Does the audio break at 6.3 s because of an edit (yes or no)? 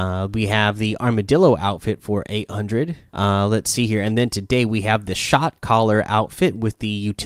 no